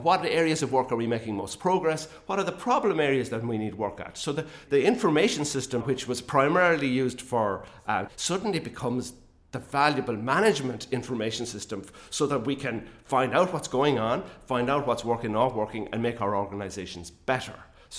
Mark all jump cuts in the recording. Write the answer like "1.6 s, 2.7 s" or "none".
5.8 s, 8.1 s